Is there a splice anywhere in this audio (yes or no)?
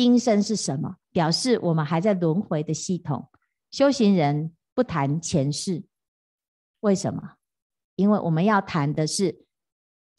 yes